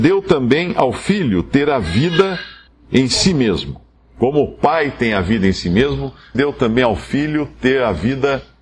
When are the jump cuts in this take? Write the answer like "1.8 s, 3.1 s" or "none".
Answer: 6.3 s